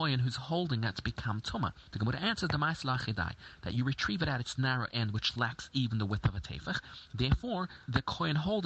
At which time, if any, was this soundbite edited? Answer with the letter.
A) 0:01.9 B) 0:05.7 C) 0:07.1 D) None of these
D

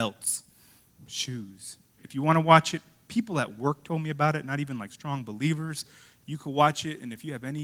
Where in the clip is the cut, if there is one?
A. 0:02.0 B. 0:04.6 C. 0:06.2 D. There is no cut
A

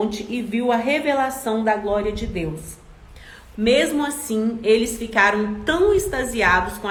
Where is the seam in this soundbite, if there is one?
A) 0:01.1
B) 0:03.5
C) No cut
B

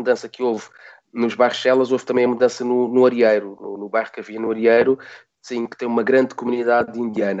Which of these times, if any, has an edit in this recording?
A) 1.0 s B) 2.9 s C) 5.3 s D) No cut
C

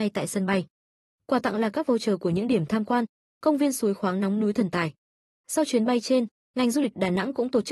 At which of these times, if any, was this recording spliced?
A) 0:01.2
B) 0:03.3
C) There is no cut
B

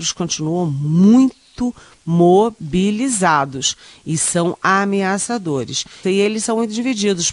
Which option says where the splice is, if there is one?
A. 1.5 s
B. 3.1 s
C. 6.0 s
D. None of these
C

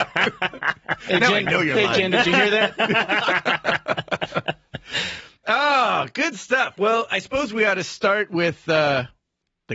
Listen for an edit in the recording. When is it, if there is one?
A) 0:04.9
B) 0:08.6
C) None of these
C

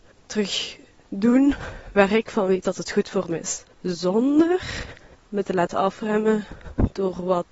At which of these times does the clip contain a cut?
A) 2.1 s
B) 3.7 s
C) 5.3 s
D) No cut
B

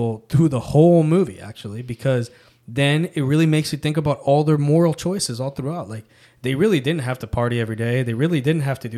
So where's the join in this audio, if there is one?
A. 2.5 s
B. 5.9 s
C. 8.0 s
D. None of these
D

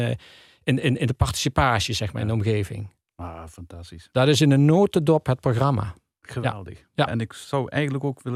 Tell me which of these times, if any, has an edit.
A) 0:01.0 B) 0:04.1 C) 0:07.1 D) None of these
C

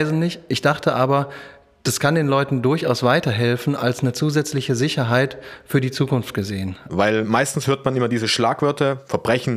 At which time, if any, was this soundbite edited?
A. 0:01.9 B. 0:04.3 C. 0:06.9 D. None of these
C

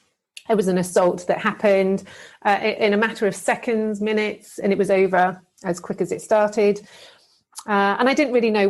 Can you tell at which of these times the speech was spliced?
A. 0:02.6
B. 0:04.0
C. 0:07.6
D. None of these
D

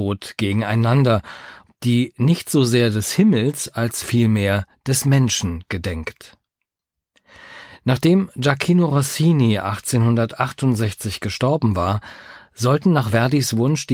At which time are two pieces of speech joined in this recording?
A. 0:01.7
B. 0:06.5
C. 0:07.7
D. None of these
A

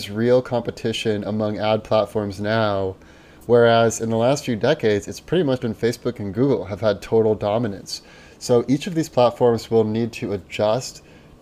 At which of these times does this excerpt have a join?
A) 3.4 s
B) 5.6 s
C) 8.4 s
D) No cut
B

